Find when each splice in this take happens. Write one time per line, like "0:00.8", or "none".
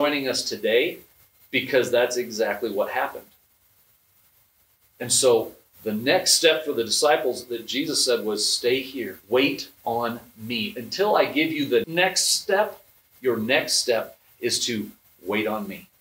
0:09.2
0:11.8